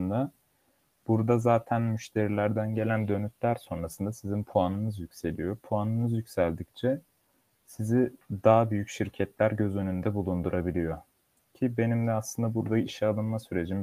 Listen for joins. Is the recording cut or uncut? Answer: uncut